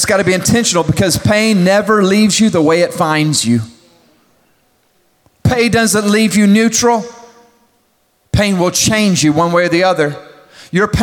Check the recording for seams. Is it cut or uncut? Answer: uncut